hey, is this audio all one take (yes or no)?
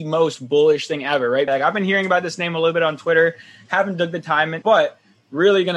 no